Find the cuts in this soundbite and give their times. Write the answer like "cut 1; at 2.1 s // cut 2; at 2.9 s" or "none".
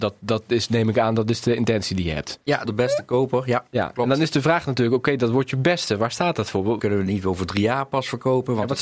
cut 1; at 2.6 s // cut 2; at 6.8 s

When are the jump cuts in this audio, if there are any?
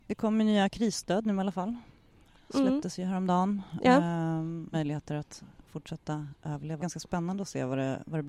cut 1; at 4.7 s // cut 2; at 6.8 s

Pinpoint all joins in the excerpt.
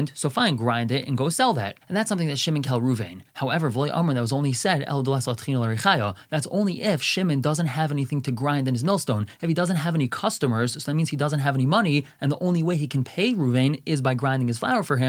cut 1; at 2.6 s

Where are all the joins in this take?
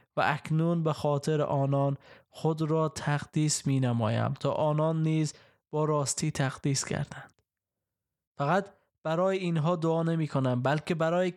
none

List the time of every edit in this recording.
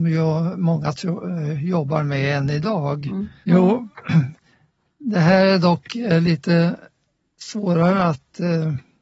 cut 1; at 3.4 s

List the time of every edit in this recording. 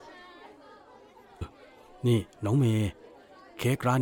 cut 1; at 1.4 s

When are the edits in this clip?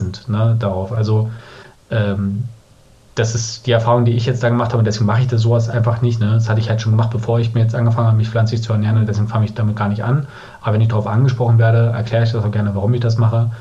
none

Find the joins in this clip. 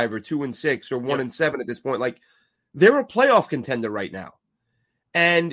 none

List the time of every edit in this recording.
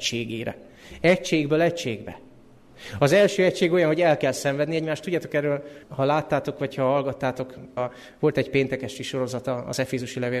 cut 1; at 5.8 s // cut 2; at 7.8 s

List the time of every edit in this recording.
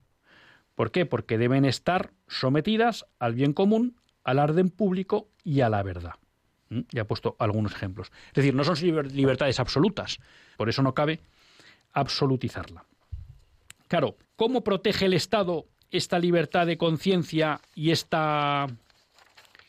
cut 1; at 10.5 s // cut 2; at 14.2 s

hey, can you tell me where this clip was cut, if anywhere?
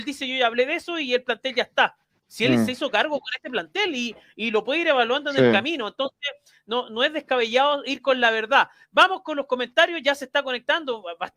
cut 1; at 2.2 s

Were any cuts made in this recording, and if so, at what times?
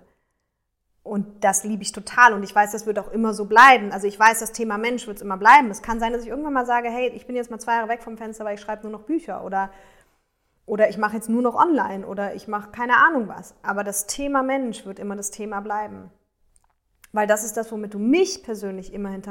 none

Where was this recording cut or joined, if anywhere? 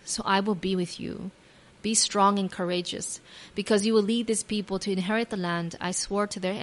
cut 1; at 1.7 s

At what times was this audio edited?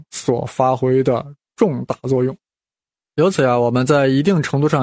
none

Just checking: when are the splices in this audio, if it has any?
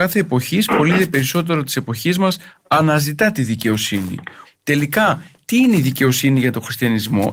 cut 1; at 4.4 s

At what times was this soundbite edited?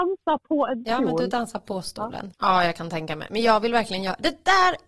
cut 1; at 2.3 s

